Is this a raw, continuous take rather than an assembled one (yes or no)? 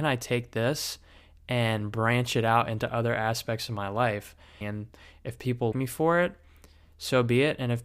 no